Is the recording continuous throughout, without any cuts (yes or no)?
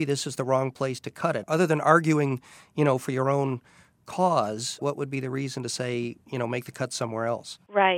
yes